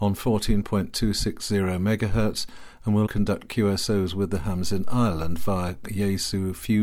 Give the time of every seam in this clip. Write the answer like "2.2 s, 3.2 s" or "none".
3.1 s